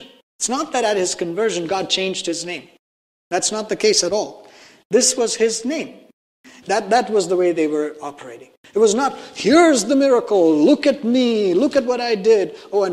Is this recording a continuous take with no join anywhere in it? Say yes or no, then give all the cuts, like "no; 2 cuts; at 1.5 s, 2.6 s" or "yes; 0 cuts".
no; 1 cut; at 6.6 s